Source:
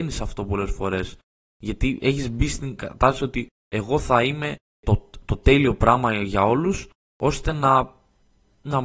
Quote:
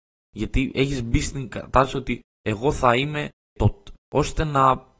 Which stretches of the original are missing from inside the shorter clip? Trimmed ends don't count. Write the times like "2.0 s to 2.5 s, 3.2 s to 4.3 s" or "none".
5.2 s to 7.0 s

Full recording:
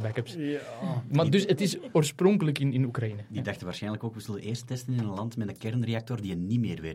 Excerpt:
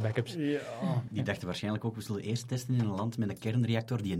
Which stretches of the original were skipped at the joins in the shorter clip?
1.1 s to 3.3 s

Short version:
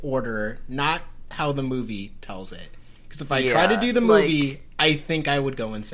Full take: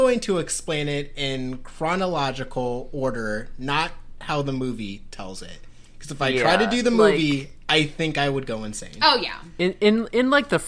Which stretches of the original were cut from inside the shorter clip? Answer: none

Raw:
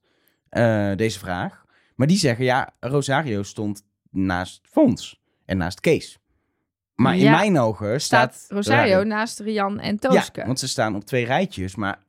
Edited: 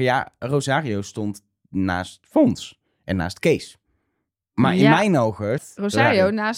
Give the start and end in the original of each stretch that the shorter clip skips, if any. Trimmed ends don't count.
8.0 s to 8.3 s

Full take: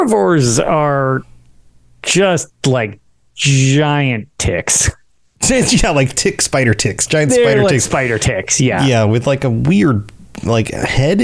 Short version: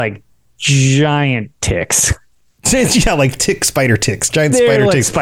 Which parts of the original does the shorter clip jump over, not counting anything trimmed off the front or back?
none

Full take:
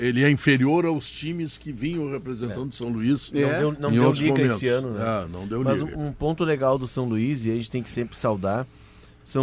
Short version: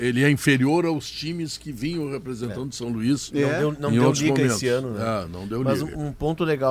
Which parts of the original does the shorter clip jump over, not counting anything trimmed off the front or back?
none

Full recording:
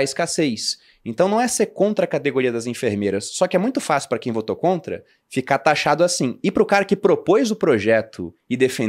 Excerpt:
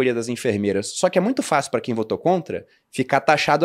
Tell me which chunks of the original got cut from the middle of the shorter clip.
none

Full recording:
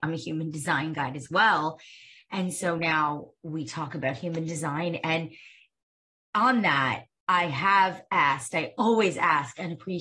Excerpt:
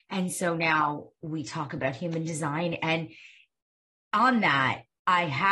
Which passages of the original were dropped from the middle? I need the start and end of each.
none

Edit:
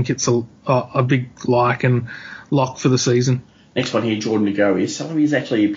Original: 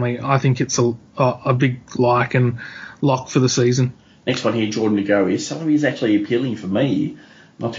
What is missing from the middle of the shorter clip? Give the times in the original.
none

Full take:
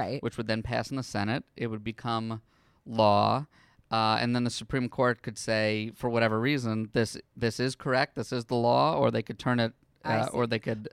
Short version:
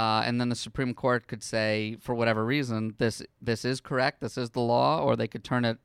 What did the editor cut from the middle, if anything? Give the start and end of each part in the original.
none

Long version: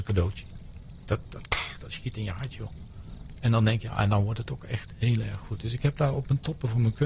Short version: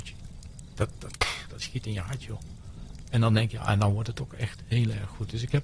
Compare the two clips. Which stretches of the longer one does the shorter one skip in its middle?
none

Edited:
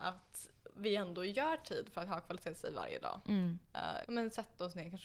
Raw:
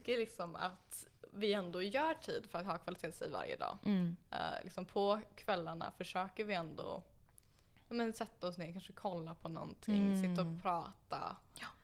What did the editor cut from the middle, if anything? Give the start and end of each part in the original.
4.6 s to 7.9 s

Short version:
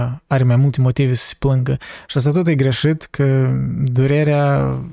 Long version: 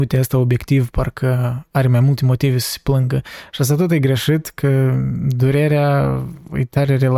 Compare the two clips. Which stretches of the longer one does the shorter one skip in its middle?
none

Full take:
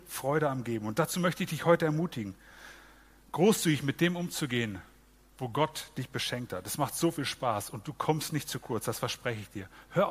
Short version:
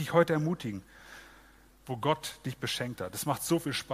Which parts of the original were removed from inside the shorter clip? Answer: 3.2 s to 5.2 s

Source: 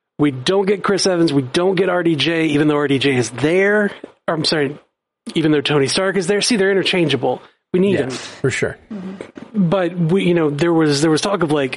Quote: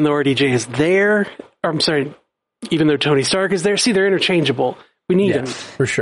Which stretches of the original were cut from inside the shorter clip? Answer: none

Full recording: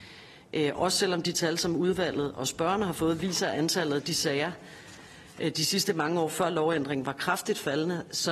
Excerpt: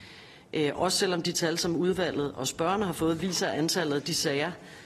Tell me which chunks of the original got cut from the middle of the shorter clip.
none

